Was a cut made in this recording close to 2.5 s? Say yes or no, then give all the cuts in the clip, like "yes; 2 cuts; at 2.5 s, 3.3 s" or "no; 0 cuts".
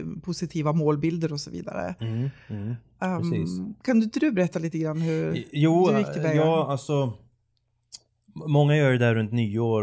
no; 0 cuts